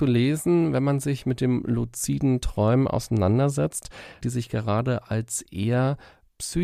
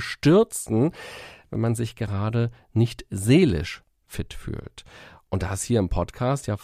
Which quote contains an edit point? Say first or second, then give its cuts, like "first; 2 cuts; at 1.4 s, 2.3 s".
first; 1 cut; at 4.2 s